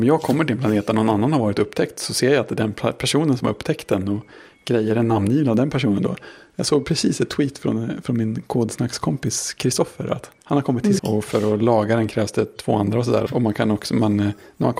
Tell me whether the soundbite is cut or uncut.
cut